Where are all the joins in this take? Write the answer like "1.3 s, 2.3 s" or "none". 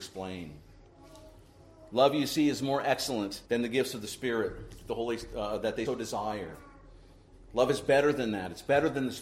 3.5 s, 5.9 s